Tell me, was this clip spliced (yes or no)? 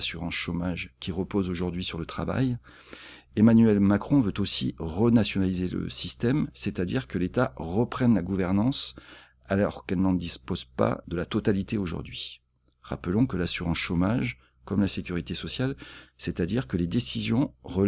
yes